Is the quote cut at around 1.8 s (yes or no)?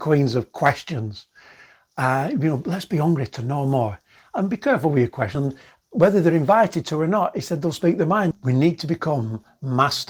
no